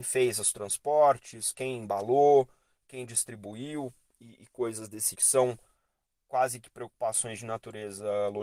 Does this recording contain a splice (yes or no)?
yes